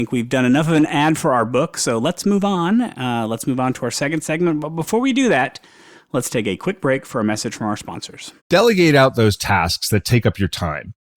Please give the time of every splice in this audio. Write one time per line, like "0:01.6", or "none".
0:08.4